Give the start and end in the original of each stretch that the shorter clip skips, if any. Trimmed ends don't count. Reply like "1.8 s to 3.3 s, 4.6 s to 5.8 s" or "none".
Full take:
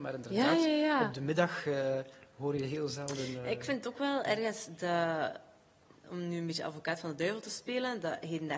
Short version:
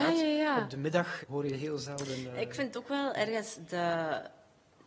1.6 s to 2.3 s